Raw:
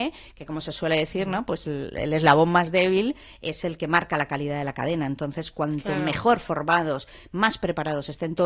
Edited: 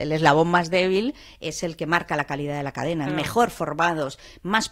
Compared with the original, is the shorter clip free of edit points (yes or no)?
no